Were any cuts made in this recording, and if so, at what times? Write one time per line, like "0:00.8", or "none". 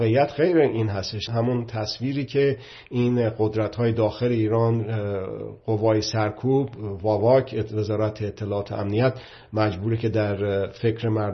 0:01.3